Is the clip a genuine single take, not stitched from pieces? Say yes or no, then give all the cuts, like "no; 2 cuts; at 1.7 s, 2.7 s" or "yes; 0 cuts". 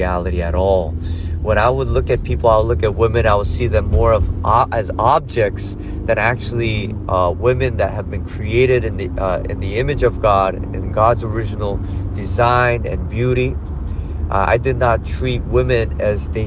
yes; 0 cuts